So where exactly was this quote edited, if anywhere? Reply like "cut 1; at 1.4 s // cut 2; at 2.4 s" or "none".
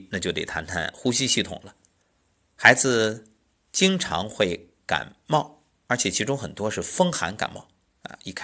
none